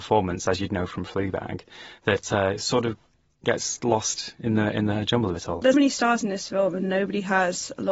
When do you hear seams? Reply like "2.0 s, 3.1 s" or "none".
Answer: 5.7 s